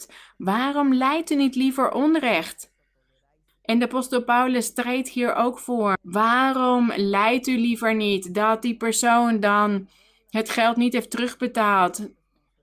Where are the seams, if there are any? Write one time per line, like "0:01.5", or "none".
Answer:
0:03.5
0:05.9

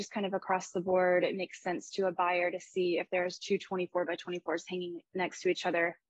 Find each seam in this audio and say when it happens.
none

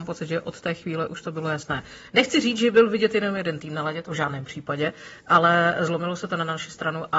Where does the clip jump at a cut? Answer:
none

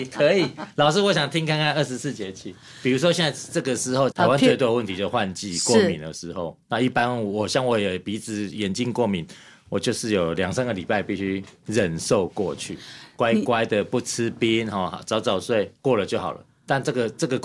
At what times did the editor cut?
0:04.1

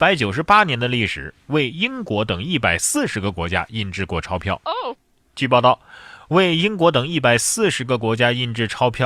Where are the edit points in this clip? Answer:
none

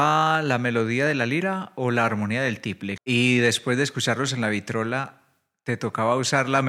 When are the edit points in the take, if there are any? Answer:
0:03.0

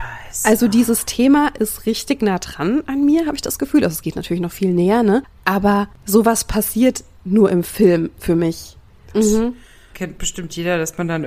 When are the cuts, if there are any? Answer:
0:09.1

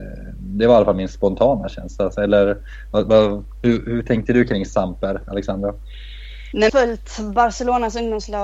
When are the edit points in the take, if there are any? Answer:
0:06.7

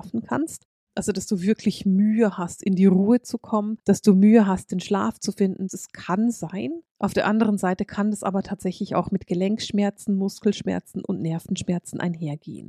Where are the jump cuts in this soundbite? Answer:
0:05.7

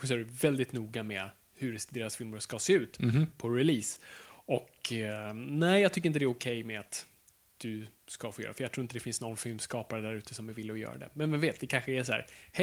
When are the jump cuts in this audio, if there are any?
none

